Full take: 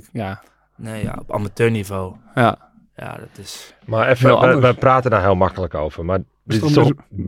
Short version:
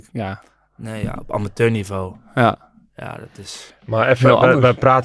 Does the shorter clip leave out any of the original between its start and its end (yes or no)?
no